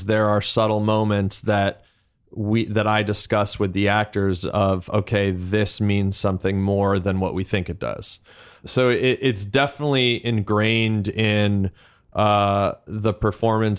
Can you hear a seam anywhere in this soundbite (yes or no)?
no